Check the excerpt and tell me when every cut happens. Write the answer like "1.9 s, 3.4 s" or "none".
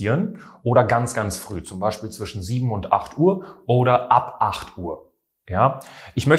none